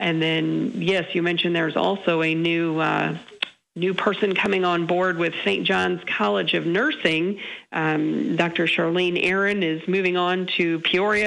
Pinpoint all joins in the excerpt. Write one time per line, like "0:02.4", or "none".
none